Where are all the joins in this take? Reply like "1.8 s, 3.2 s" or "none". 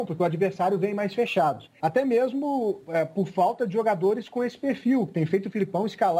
1.8 s